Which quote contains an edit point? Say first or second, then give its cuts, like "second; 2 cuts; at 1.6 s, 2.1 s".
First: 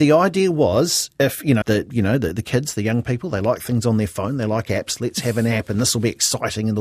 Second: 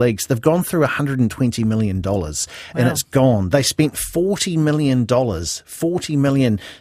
first; 1 cut; at 1.6 s